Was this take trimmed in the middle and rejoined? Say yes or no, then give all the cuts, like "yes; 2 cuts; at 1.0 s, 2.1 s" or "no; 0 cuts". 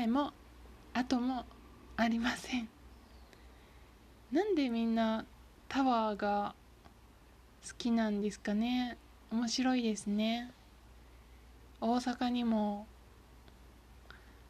no; 0 cuts